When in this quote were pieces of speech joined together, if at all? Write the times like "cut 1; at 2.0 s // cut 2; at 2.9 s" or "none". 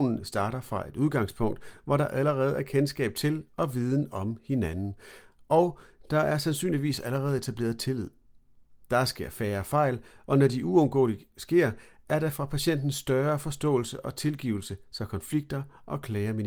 none